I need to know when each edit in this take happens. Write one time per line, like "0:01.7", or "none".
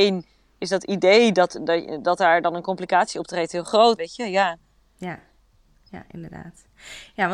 0:04.0